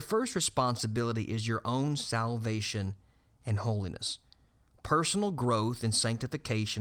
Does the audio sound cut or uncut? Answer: uncut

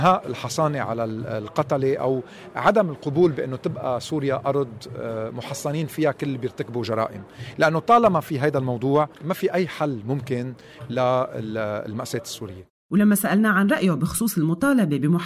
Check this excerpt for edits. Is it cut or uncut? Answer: cut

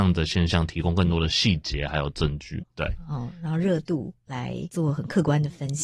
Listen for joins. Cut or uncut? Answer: cut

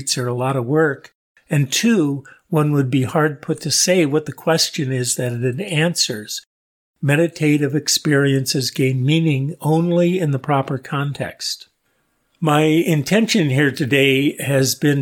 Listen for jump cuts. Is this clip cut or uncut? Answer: uncut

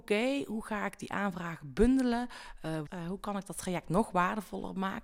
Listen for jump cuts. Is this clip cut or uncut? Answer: cut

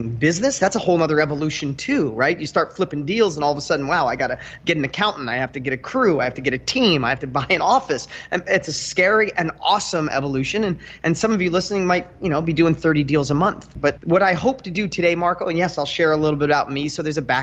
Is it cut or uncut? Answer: uncut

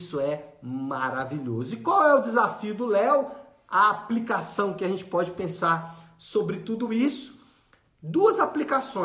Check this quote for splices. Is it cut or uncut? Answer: uncut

